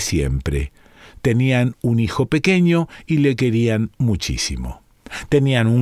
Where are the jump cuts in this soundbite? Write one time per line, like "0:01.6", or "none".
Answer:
none

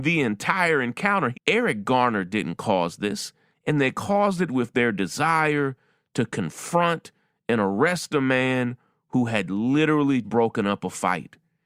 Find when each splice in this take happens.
0:01.3
0:03.5
0:10.2

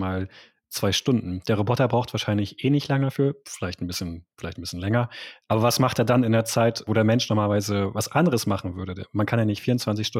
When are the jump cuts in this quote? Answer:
0:05.4

